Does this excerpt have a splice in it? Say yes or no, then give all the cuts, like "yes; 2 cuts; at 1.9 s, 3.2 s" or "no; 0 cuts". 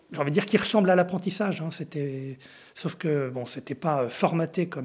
no; 0 cuts